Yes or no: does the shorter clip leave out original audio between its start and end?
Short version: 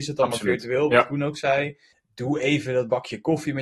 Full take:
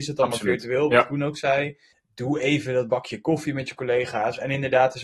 no